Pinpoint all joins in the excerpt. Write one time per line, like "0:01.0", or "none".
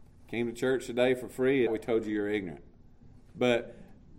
0:01.7